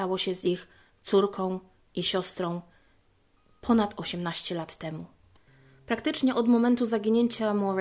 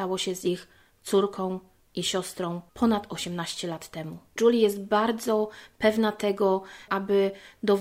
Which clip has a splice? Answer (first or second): second